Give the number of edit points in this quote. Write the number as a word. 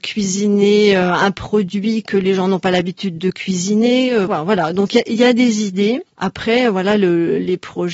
one